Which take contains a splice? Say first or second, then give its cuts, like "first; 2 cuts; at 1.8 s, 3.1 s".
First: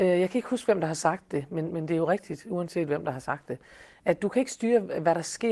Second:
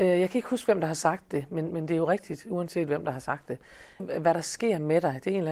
second; 1 cut; at 4.0 s